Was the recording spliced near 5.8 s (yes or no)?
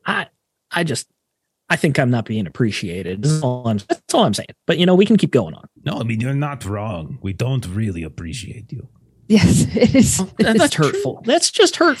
yes